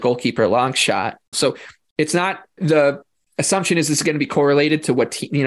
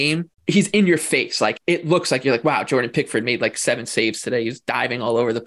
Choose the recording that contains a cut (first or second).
first